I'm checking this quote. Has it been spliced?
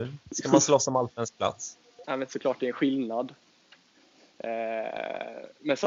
yes; 1 cut; at 2.0 s

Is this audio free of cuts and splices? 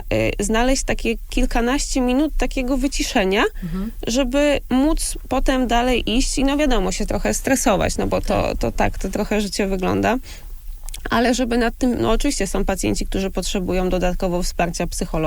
yes; 0 cuts

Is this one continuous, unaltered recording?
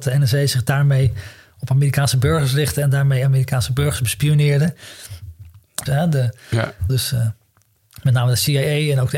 no; 2 cuts; at 5.9 s, 6.9 s

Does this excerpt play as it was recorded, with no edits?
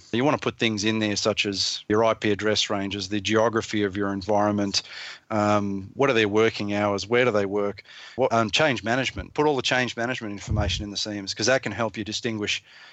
no; 2 cuts; at 5.2 s, 8.3 s

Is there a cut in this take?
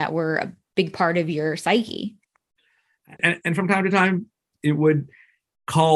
yes; 1 cut; at 3.2 s

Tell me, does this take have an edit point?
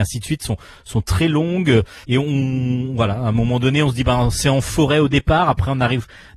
yes; 1 cut; at 2.0 s

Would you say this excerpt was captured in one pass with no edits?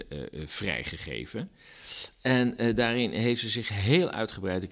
yes; 0 cuts

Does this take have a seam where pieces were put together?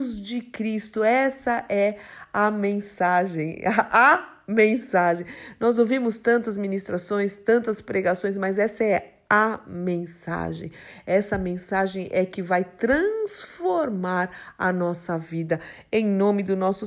no; 0 cuts

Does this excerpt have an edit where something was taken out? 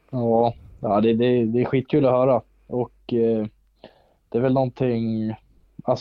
no; 0 cuts

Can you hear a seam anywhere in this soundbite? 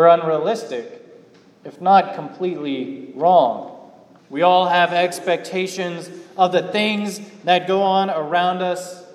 yes; 1 cut; at 4.2 s

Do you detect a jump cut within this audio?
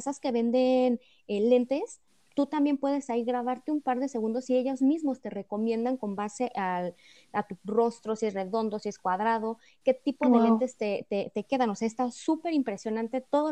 no; 0 cuts

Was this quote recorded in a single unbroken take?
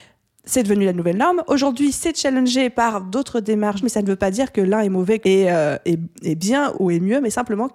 no; 3 cuts; at 3.8 s, 5.2 s, 6.7 s

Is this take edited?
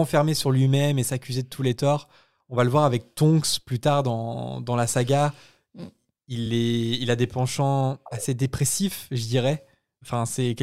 no; 0 cuts

